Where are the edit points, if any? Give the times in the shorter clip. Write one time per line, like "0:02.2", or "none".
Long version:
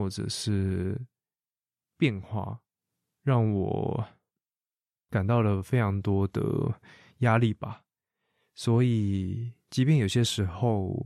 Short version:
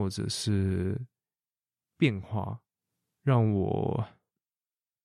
none